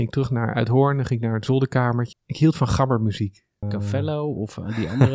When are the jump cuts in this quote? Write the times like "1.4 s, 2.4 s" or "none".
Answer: 2.1 s, 3.6 s